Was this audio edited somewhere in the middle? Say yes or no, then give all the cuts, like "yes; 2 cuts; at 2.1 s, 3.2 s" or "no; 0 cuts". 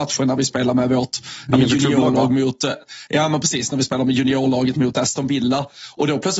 no; 0 cuts